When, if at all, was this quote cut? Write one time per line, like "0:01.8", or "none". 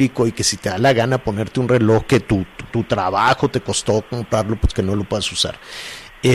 0:02.7